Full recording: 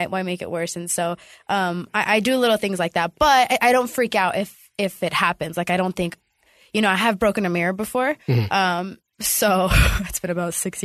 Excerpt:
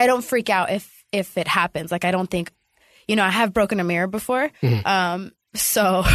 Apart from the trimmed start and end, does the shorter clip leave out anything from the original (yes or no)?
no